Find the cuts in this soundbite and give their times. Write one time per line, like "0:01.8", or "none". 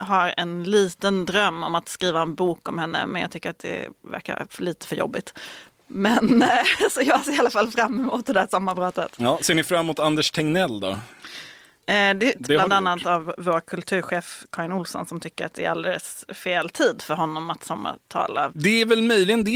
0:12.3
0:18.5